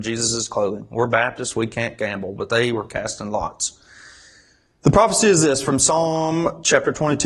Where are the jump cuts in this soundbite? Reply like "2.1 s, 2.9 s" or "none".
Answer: none